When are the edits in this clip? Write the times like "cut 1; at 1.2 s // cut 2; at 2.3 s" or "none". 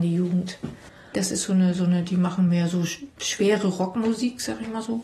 cut 1; at 1.1 s // cut 2; at 3.1 s